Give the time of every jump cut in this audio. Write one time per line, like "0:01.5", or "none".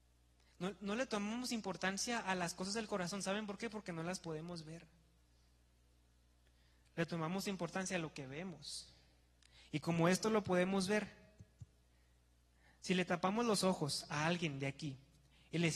none